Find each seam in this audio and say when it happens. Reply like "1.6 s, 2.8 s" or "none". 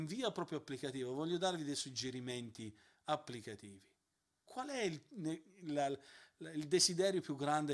4.4 s